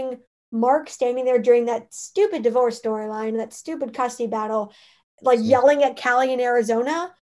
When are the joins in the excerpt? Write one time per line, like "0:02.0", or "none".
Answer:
none